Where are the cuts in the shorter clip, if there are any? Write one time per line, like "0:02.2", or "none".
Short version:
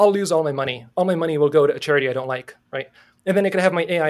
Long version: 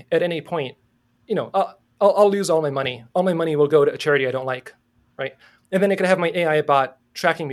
0:02.7